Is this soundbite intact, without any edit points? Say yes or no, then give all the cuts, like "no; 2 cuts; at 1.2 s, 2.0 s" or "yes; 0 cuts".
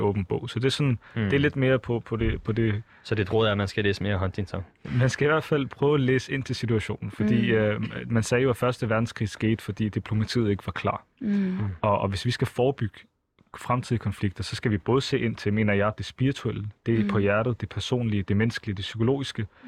yes; 0 cuts